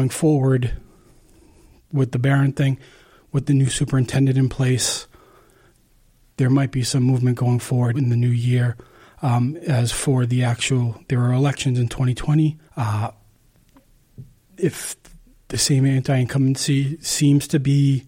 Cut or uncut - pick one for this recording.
cut